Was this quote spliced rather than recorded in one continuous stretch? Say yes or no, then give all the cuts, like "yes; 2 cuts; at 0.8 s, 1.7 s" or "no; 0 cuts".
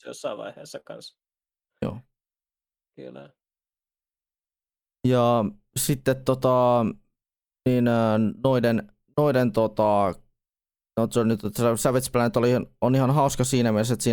no; 0 cuts